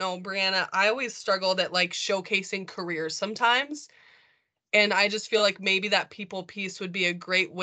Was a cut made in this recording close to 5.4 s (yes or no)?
no